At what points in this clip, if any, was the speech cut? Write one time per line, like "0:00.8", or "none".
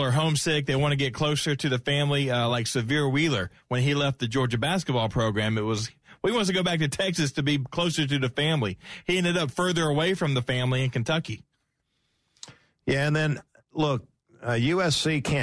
none